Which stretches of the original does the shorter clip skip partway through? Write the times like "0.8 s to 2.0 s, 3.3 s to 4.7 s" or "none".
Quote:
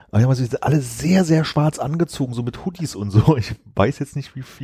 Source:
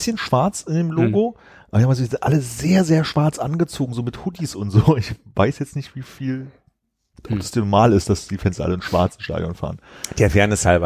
none